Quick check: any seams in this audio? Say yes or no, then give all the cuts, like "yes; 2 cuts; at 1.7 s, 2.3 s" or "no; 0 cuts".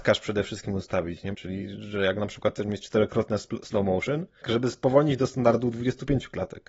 yes; 2 cuts; at 1.3 s, 4.4 s